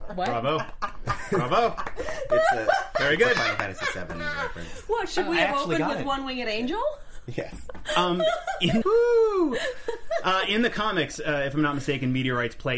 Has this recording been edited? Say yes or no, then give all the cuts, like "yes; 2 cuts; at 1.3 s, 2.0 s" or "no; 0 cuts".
yes; 1 cut; at 8.8 s